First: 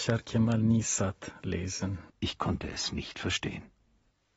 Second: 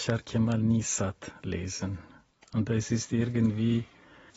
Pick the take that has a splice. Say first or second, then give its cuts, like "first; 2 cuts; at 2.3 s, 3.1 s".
first; 1 cut; at 2.1 s